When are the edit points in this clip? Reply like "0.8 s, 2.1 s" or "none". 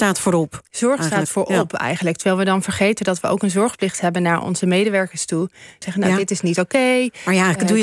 5.8 s